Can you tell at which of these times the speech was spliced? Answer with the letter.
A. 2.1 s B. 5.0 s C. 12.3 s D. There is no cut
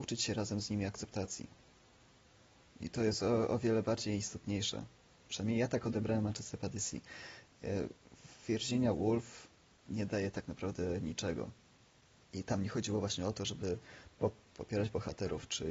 C